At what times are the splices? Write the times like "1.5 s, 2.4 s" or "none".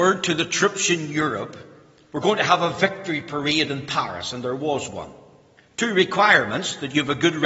none